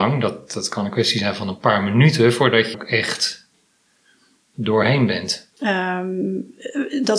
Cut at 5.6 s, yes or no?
yes